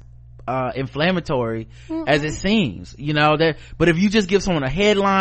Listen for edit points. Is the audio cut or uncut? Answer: uncut